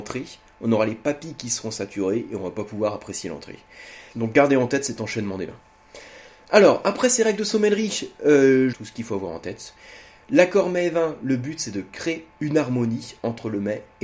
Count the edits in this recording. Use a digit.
2